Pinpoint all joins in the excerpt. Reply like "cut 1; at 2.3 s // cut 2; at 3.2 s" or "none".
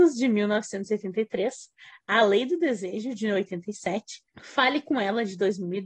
cut 1; at 4.3 s